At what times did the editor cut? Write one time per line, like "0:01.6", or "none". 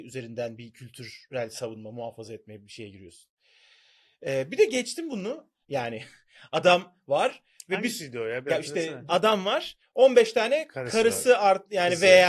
0:05.6
0:09.1